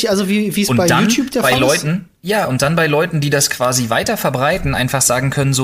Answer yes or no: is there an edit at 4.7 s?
no